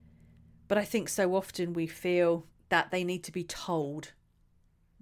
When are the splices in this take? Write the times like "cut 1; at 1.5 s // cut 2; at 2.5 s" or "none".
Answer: cut 1; at 2.5 s